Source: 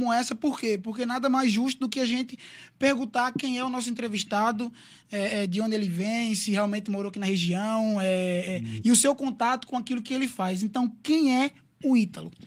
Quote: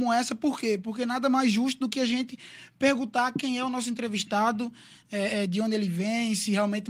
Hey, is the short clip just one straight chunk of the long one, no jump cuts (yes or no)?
yes